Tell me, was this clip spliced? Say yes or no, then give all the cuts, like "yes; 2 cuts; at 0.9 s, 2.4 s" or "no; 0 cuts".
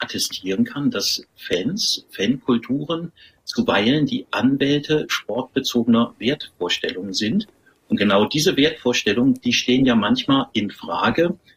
no; 0 cuts